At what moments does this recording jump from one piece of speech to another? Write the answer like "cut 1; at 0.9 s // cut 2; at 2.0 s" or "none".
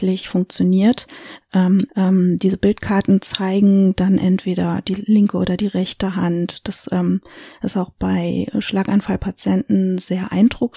cut 1; at 1.9 s